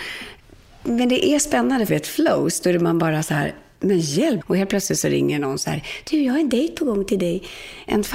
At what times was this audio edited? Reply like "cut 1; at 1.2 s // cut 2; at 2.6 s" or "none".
cut 1; at 1.9 s // cut 2; at 4.4 s

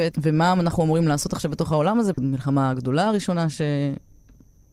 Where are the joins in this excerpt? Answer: cut 1; at 2.1 s

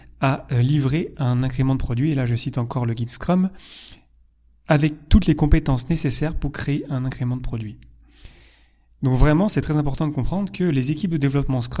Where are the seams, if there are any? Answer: none

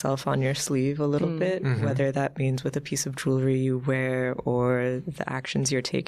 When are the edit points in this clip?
none

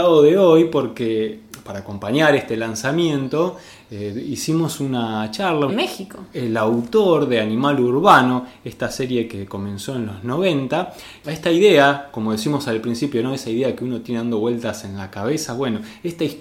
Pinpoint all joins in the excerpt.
cut 1; at 5.7 s

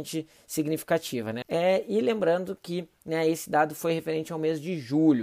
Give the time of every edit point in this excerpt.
cut 1; at 1.4 s

